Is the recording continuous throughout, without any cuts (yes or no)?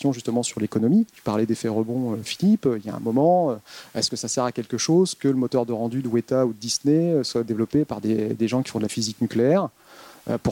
no